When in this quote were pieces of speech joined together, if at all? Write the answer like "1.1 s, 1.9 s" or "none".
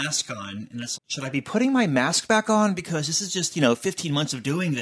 1.0 s